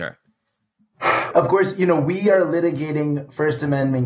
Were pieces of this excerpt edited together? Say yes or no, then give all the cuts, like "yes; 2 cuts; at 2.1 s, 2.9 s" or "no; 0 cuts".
yes; 1 cut; at 1.3 s